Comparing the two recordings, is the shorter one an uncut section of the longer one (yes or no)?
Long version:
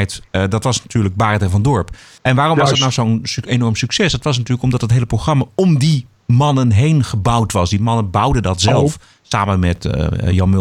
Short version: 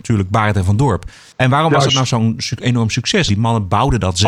no